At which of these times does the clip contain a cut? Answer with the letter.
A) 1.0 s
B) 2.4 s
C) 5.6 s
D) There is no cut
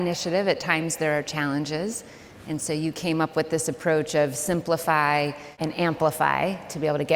C